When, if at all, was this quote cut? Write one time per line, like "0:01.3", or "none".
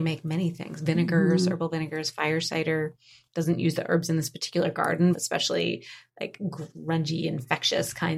0:05.1